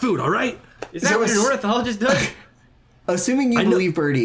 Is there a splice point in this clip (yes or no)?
no